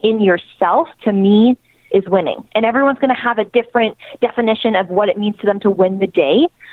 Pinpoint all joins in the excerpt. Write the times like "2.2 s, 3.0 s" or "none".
0.9 s